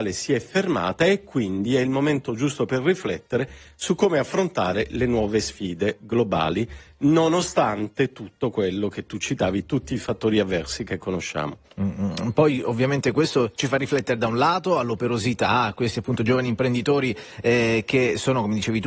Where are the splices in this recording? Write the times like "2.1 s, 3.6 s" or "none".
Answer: none